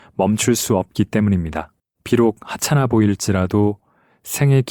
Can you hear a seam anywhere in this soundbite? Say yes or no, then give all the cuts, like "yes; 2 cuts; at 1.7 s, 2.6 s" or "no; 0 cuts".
yes; 1 cut; at 1.9 s